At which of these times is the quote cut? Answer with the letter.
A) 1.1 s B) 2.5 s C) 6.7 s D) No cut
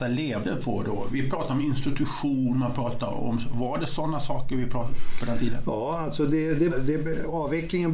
C